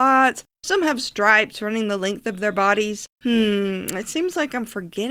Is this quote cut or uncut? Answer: cut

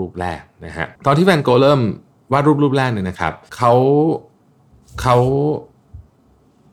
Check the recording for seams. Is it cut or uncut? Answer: cut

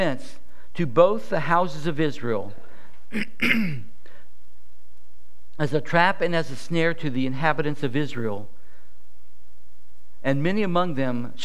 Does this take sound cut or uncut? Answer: uncut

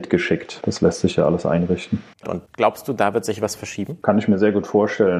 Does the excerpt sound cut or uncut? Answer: cut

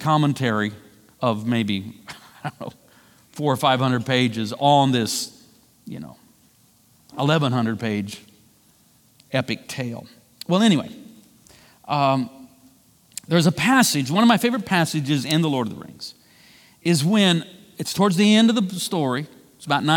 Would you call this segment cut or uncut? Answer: uncut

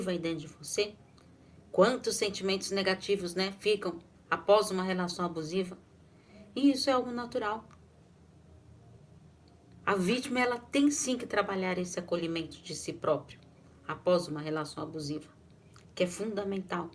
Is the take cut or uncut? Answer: cut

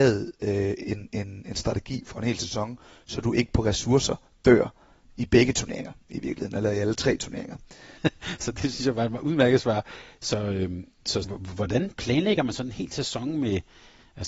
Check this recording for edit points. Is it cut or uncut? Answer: cut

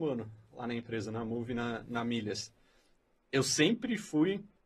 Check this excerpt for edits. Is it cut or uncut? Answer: uncut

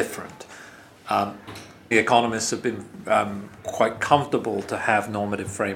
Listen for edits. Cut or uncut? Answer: cut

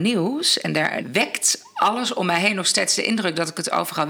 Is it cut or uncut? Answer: cut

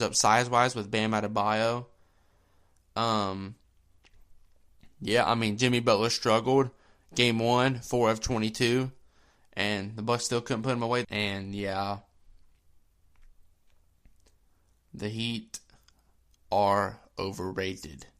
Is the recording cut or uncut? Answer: cut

